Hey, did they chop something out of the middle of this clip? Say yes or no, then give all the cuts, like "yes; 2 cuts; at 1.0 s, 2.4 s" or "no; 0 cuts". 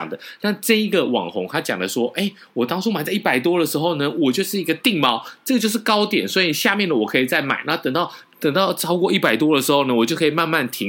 no; 0 cuts